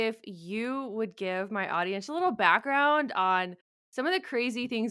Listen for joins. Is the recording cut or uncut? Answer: cut